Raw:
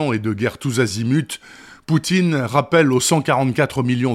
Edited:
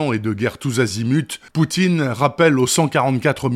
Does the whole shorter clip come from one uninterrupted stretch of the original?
no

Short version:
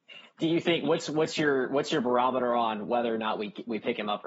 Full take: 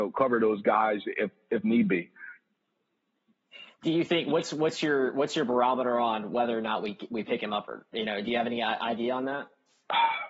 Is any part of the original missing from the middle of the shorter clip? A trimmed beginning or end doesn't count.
no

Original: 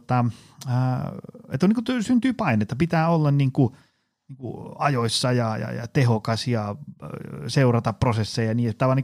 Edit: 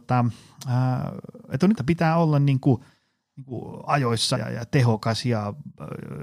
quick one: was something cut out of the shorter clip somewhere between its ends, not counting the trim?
yes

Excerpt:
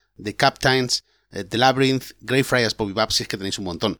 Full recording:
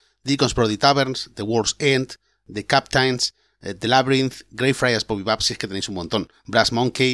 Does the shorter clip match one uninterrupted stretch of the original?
yes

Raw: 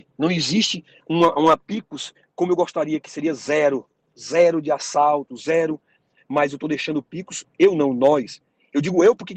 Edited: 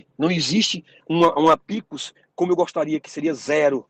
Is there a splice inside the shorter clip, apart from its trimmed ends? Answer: no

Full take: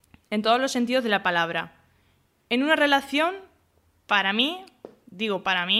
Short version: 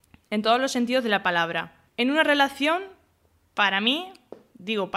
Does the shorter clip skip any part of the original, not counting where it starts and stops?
yes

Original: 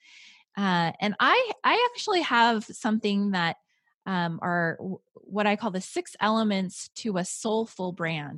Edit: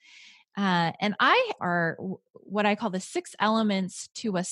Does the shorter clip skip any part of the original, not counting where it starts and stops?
yes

